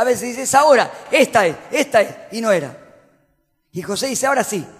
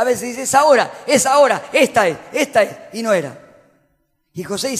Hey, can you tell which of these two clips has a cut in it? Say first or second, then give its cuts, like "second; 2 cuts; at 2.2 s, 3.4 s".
first; 1 cut; at 1.1 s